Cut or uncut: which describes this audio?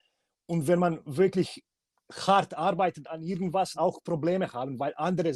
cut